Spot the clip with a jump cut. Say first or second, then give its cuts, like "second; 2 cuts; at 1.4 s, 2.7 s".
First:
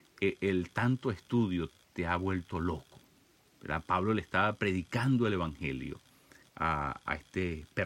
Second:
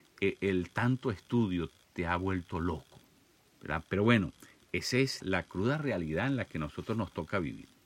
second; 2 cuts; at 3.8 s, 5.2 s